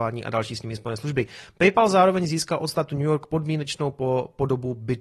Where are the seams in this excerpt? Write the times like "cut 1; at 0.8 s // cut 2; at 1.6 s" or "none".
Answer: none